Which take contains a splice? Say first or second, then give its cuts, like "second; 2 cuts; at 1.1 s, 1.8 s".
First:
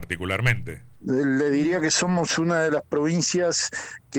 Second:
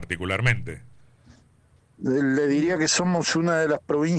first; 1 cut; at 1.0 s